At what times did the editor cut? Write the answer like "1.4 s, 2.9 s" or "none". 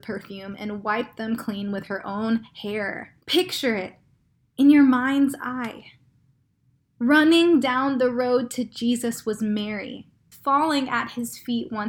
3.2 s, 10.3 s